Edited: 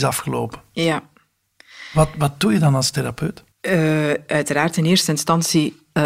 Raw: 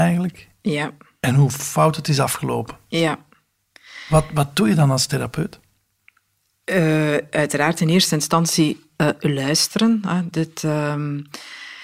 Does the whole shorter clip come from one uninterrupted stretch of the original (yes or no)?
no